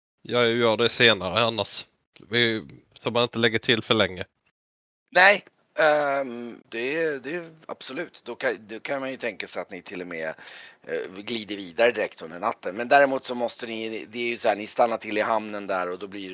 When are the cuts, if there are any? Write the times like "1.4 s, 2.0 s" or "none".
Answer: 6.6 s